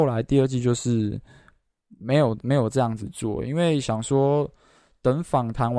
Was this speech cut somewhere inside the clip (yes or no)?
no